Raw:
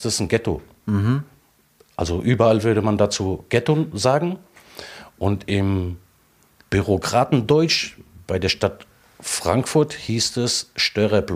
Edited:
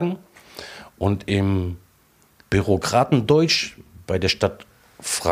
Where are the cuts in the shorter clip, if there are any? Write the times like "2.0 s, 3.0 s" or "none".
none